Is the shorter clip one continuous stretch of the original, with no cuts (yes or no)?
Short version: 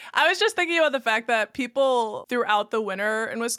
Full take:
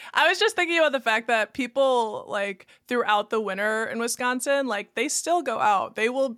no